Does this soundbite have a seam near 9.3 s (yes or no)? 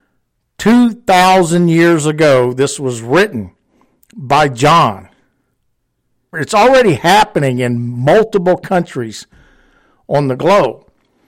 no